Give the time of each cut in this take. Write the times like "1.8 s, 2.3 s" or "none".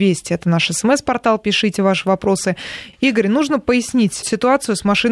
2.9 s, 4.2 s